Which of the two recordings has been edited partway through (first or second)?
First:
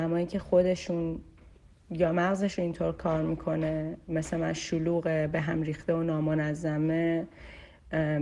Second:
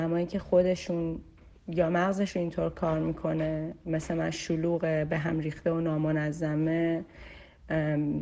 second